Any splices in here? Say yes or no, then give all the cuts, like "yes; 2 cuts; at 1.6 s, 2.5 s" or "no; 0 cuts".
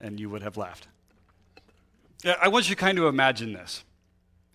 yes; 1 cut; at 2.1 s